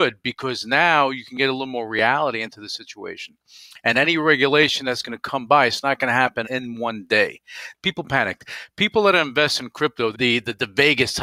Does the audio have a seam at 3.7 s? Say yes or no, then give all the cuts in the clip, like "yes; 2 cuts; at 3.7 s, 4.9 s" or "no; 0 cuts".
no; 3 cuts; at 6.4 s, 7.7 s, 10.1 s